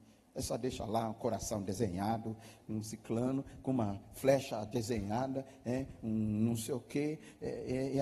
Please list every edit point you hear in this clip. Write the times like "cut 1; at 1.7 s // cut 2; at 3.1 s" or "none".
cut 1; at 2.6 s